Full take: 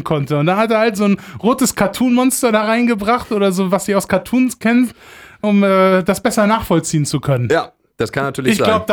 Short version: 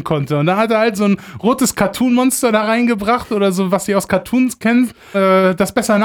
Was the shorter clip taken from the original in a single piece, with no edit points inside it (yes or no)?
no